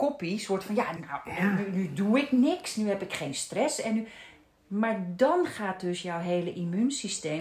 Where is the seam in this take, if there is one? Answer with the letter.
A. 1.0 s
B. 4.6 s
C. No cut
A